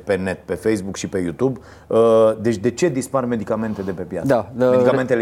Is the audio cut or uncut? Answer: uncut